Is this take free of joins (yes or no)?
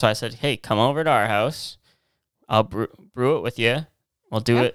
yes